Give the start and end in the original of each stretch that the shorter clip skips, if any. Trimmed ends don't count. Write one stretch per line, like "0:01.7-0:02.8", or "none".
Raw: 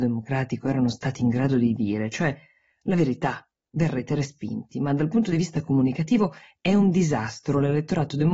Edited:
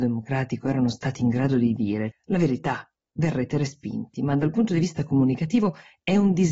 0:02.1-0:02.7